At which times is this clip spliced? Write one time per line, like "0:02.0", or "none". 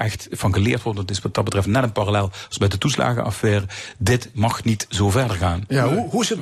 none